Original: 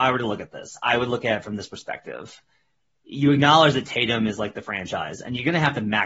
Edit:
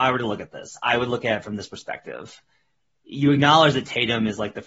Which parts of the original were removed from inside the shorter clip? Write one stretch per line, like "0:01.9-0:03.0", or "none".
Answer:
none